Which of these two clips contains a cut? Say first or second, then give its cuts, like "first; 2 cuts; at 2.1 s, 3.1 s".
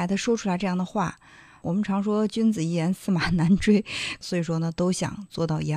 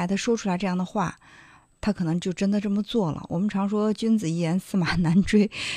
first; 2 cuts; at 1.6 s, 4.2 s